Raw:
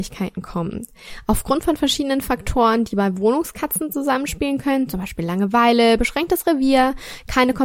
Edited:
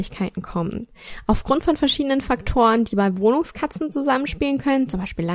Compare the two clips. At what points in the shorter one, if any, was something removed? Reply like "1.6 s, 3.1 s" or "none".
none